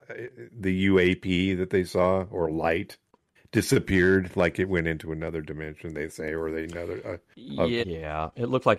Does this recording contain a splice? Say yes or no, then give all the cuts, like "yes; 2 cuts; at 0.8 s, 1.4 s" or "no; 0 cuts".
yes; 1 cut; at 7.8 s